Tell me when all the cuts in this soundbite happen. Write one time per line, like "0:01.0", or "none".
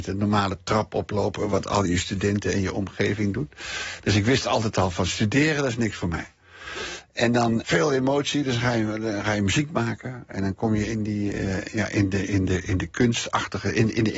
0:07.6